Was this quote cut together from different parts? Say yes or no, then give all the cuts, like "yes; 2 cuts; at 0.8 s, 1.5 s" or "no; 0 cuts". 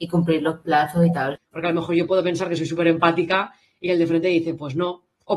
yes; 1 cut; at 1.4 s